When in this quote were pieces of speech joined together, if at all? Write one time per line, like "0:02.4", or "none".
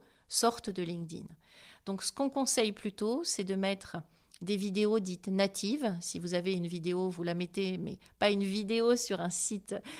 none